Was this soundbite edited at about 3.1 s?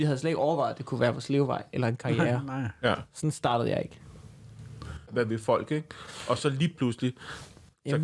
no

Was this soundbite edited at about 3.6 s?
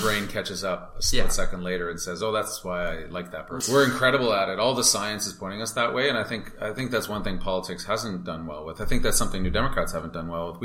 yes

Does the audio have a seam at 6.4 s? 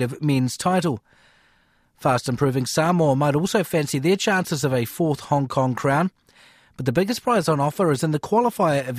no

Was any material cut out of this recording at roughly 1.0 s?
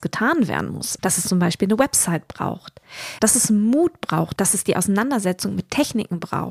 yes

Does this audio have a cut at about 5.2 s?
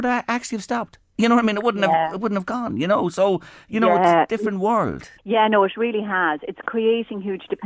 yes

